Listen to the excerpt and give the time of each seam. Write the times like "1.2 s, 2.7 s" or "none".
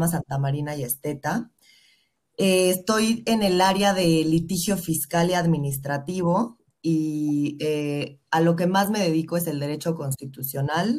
none